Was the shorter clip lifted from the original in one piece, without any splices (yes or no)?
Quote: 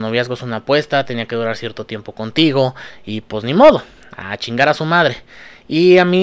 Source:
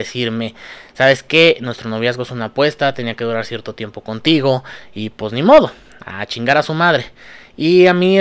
yes